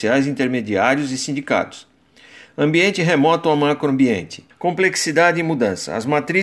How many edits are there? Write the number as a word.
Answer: one